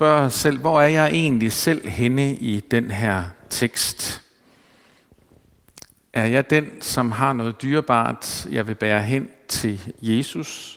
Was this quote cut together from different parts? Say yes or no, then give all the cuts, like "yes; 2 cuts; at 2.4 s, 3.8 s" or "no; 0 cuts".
no; 0 cuts